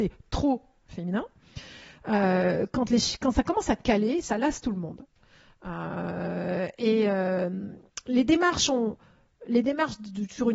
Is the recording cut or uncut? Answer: uncut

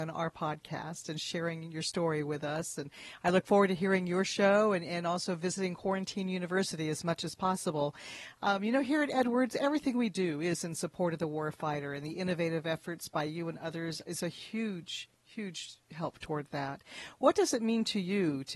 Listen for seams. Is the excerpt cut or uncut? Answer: uncut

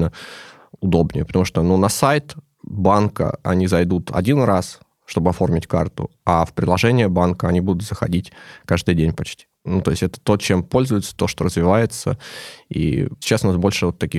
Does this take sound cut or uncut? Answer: uncut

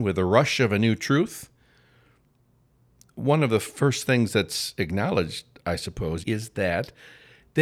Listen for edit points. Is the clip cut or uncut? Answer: cut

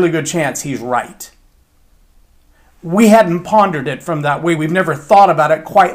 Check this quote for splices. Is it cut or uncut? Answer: uncut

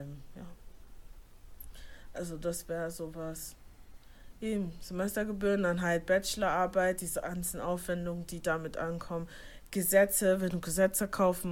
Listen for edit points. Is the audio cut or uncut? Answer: uncut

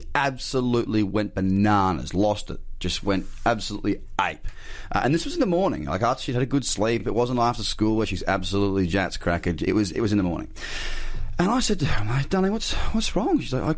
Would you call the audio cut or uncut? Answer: uncut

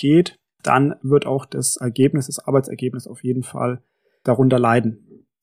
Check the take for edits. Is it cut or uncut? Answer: cut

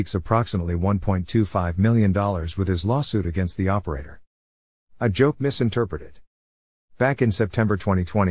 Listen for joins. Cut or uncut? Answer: uncut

